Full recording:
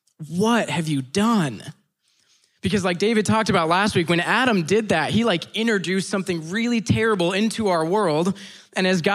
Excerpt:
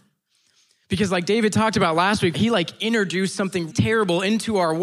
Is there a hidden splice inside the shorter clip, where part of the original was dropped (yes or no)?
yes